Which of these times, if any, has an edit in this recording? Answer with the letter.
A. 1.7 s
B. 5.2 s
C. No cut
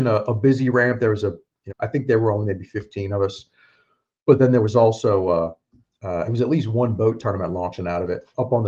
A